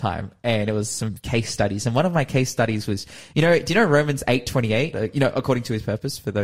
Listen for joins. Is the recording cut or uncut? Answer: cut